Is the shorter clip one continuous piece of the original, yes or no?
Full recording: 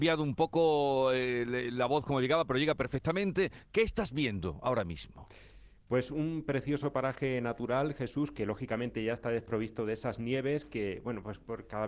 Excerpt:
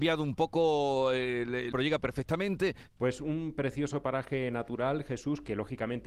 no